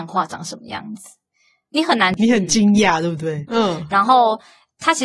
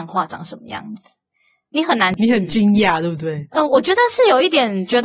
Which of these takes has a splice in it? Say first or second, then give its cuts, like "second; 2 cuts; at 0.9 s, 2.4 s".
first; 1 cut; at 3.5 s